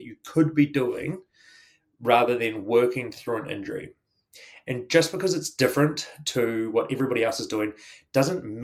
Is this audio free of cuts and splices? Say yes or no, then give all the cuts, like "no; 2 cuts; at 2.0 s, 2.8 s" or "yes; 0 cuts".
yes; 0 cuts